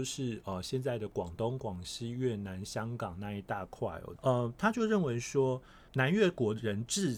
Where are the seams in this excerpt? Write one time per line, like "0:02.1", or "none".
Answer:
0:04.2
0:05.9